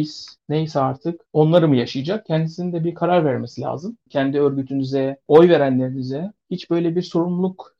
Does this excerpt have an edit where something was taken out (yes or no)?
yes